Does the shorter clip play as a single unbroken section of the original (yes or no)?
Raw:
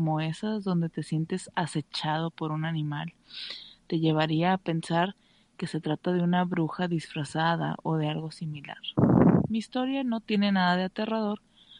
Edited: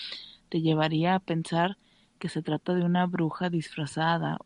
yes